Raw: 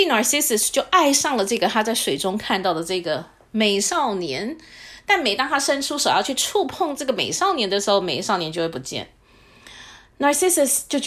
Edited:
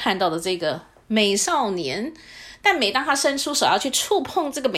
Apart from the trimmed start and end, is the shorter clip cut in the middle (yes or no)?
no